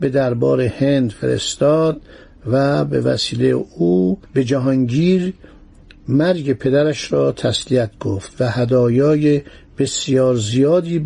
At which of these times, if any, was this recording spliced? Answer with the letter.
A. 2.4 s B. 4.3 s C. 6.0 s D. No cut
B